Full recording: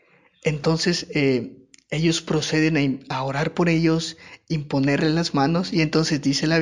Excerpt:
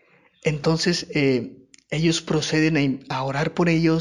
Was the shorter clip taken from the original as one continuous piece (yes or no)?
yes